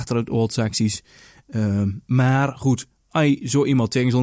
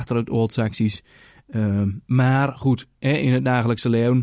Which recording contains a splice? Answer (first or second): first